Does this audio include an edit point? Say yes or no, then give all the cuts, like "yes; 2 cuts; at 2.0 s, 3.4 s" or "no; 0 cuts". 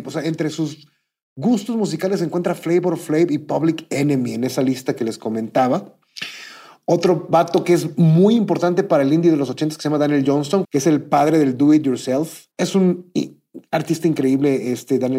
yes; 2 cuts; at 10.6 s, 12.5 s